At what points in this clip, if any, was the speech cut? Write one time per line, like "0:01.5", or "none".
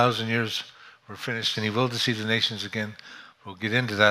0:01.5

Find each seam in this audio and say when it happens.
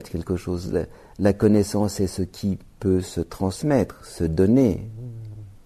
none

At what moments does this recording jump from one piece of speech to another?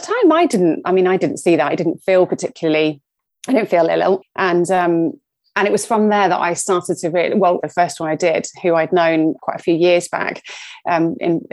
0:04.2
0:07.6
0:09.4

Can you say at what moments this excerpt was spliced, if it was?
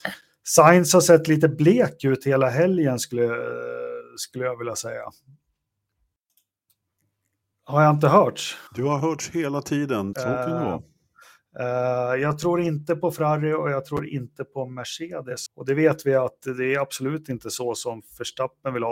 0:08.7
0:10.1
0:15.5

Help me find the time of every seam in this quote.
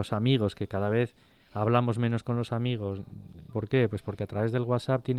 0:03.5

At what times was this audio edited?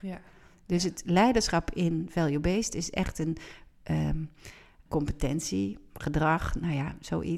0:04.9

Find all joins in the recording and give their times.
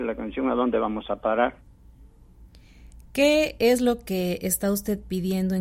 none

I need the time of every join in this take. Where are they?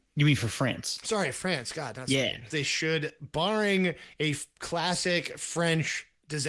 0:02.5

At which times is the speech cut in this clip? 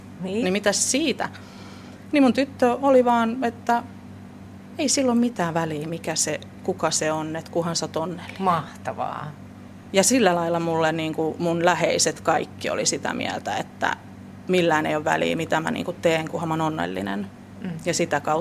none

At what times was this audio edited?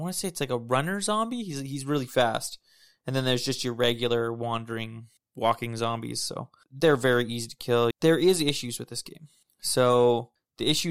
0:07.9

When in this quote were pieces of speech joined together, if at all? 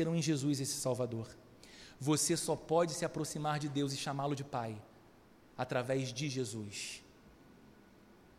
none

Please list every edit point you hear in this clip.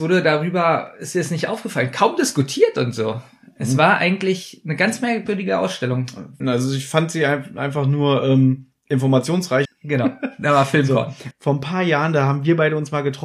0:06.4
0:09.7
0:11.3

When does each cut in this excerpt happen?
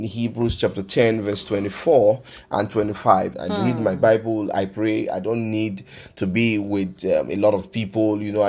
0:03.3

